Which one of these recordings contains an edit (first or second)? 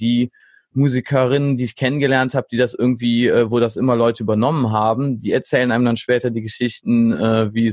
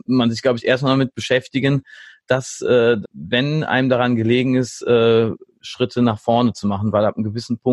second